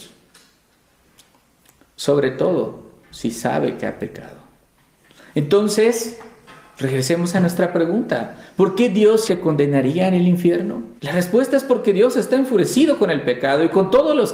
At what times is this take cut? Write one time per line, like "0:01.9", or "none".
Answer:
0:09.3
0:11.0